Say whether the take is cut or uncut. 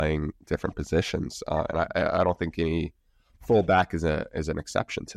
uncut